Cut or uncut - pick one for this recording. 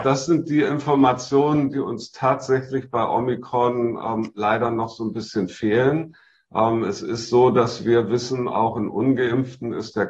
uncut